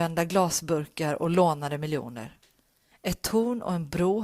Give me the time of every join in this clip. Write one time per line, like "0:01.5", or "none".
0:02.9